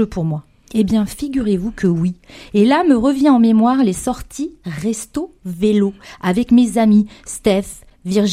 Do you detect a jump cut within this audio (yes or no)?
no